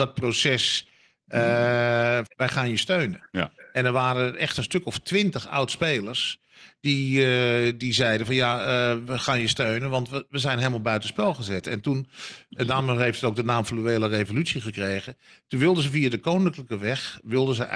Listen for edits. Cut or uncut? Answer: cut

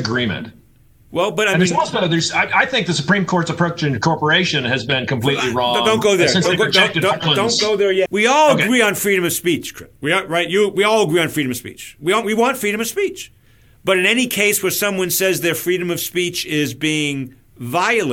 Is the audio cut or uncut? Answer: cut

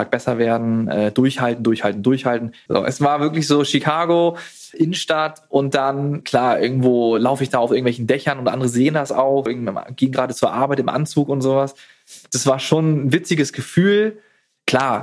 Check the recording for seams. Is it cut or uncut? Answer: cut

